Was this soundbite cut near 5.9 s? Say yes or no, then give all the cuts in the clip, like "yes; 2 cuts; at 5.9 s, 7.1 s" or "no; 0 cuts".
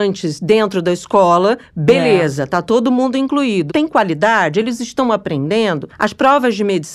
no; 1 cut; at 3.7 s